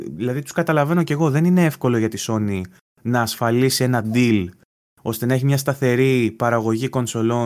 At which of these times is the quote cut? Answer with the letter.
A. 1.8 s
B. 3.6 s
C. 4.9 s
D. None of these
D